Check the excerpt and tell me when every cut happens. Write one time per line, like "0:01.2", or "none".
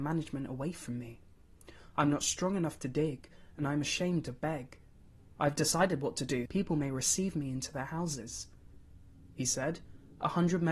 0:06.5
0:09.3